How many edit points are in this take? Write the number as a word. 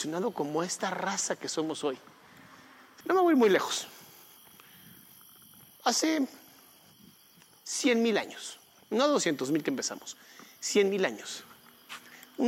one